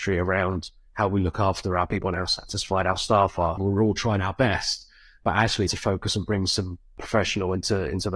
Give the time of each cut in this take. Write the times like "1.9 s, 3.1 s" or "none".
3.6 s, 5.7 s